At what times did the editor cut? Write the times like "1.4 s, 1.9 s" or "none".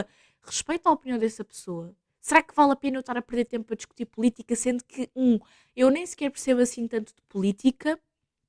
none